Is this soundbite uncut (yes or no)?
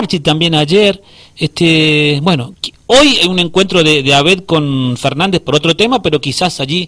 no